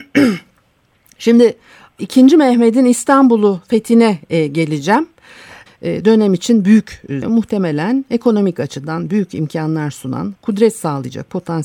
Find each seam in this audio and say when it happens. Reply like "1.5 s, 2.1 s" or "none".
2.0 s, 5.7 s, 7.2 s